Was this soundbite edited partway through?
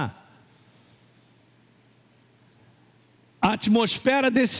no; 0 cuts

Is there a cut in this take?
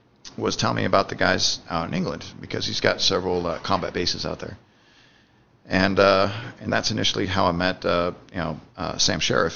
no; 0 cuts

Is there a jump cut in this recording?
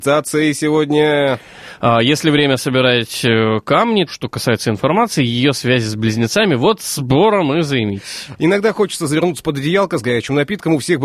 yes; 2 cuts; at 4.1 s, 8.4 s

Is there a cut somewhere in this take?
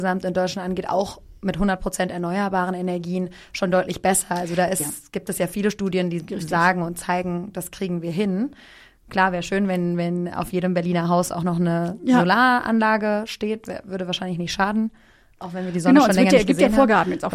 no; 0 cuts

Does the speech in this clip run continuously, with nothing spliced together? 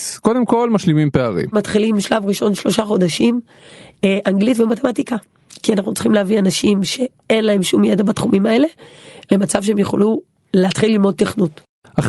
yes; 0 cuts

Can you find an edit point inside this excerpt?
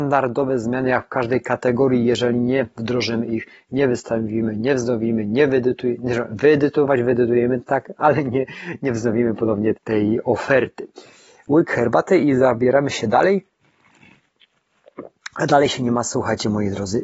yes; 1 cut; at 9.7 s

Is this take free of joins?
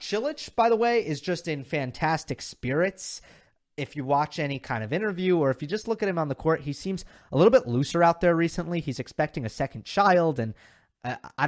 yes; 0 cuts

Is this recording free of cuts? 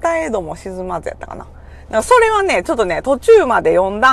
yes; 0 cuts

